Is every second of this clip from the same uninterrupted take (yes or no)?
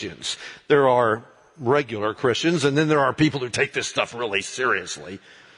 yes